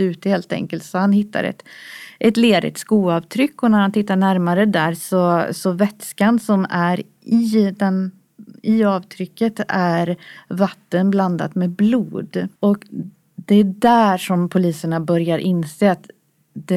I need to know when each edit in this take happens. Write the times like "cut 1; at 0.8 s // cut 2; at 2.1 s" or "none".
cut 1; at 12.6 s